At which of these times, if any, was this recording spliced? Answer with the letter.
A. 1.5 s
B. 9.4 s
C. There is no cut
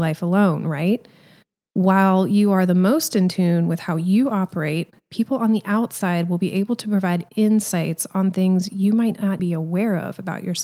B